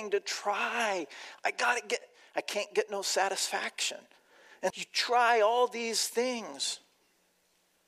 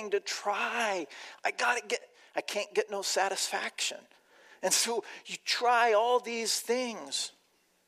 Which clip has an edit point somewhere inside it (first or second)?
first